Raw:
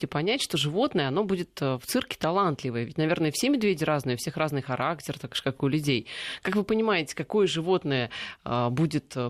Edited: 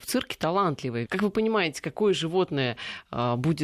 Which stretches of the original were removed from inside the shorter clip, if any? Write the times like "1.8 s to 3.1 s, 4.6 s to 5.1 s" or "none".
2.9 s to 6.4 s